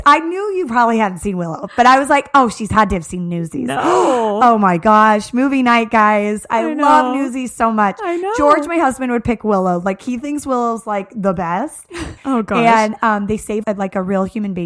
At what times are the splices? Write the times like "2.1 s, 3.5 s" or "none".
12.2 s, 13.6 s